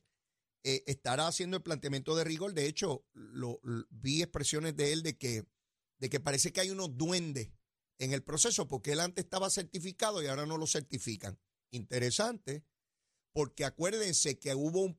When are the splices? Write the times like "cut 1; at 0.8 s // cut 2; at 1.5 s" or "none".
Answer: none

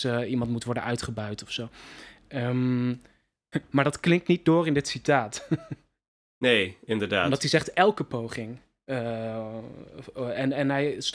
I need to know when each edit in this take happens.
cut 1; at 3.5 s

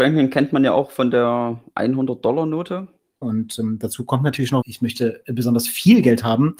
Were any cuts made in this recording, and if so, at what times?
cut 1; at 3.2 s // cut 2; at 4.6 s

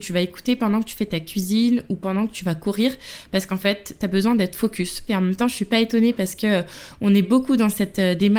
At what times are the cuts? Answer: cut 1; at 5.1 s

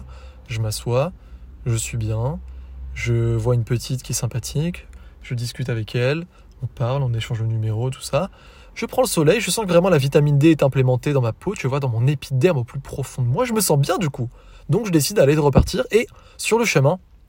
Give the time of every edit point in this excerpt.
none

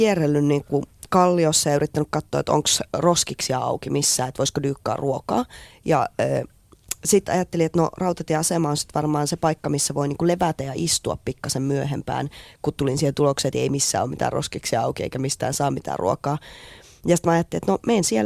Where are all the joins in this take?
none

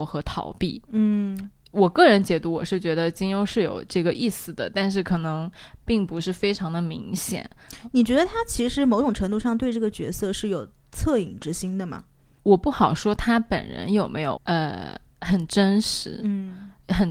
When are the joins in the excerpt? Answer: cut 1; at 12.4 s // cut 2; at 14.4 s

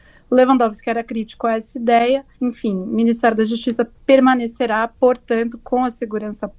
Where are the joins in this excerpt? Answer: cut 1; at 2.3 s

